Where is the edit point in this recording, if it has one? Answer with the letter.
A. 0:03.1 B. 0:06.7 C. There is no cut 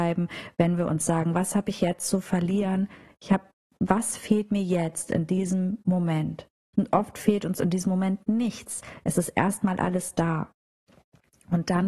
B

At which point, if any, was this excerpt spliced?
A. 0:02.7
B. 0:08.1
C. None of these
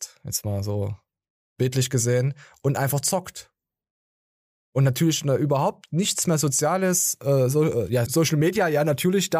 B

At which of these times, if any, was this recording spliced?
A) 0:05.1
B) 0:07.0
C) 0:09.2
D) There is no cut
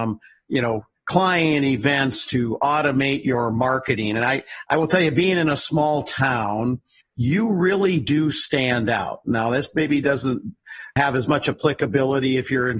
B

